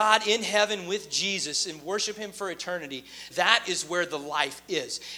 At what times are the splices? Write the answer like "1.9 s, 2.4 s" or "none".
3.3 s